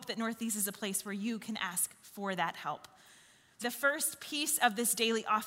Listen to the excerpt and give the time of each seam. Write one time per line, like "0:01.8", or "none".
0:03.6